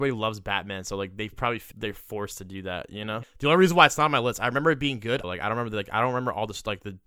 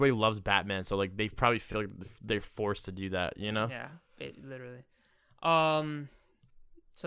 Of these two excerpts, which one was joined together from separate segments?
first; 3 cuts; at 1.7 s, 3.2 s, 5.2 s

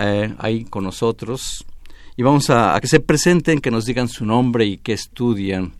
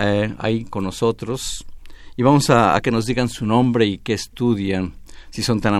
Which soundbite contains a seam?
second; 1 cut; at 2.8 s

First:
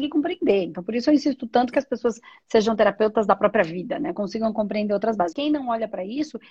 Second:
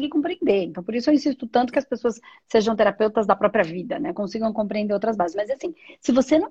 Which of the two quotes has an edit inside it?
first; 1 cut; at 5.3 s

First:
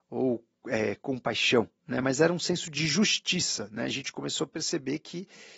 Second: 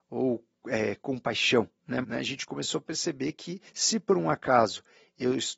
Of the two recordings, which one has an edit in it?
second; 2 cuts; at 2.0 s, 3.7 s

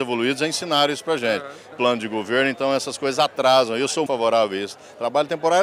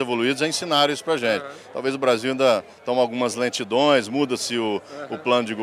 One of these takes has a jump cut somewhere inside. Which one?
first; 2 cuts; at 1.7 s, 4.1 s

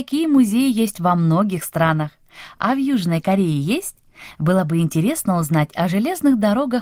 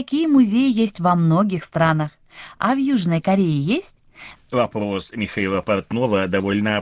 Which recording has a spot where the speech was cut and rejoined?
second; 1 cut; at 4.4 s

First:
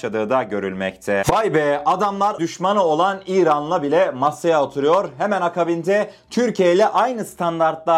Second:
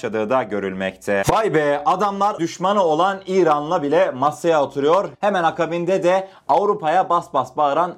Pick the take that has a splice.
second; 1 cut; at 5.1 s

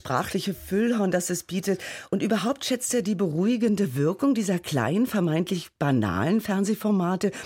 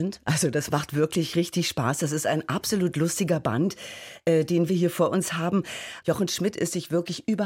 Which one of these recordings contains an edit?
second; 1 cut; at 6.0 s

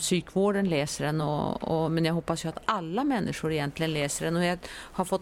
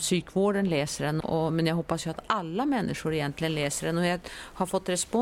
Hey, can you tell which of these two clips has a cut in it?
second; 1 cut; at 1.2 s

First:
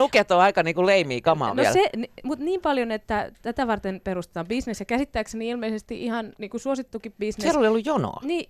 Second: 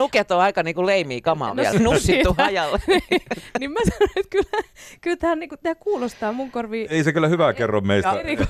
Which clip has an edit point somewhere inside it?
second; 1 cut; at 1.7 s

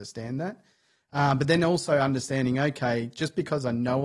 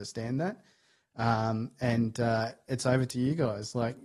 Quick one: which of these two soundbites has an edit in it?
second; 1 cut; at 1.1 s

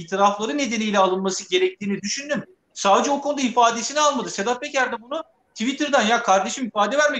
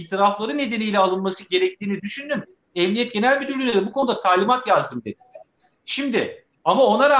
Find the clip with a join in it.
first; 1 cut; at 2.7 s

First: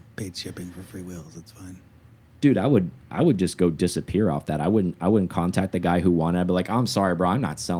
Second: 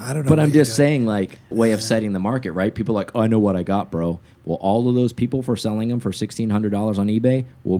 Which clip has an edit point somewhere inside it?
second; 1 cut; at 1.5 s

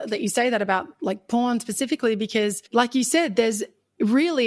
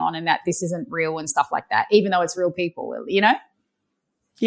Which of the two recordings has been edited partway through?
first; 1 cut; at 2.7 s

